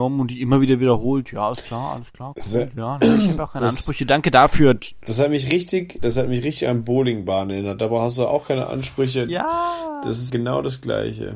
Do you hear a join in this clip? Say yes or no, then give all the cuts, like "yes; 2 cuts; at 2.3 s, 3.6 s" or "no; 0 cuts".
yes; 2 cuts; at 9.3 s, 10.3 s